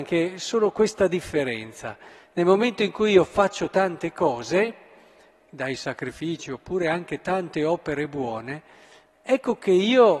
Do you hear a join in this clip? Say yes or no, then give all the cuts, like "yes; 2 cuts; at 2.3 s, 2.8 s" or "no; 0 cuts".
no; 0 cuts